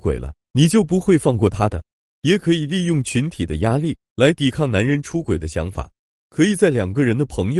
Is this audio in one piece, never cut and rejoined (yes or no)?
yes